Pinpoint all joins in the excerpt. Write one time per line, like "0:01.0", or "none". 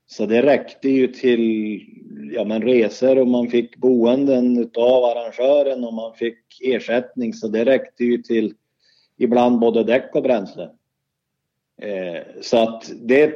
none